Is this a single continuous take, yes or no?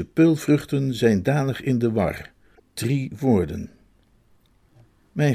yes